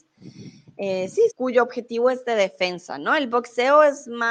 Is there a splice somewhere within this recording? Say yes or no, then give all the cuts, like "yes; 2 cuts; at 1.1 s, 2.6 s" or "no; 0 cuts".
yes; 1 cut; at 1.3 s